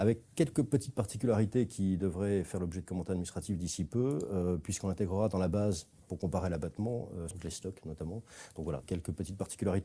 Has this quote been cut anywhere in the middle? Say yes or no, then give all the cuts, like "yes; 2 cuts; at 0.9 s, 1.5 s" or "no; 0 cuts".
yes; 2 cuts; at 7.3 s, 8.8 s